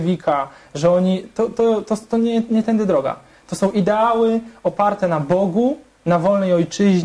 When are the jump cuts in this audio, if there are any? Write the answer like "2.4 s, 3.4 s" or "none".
none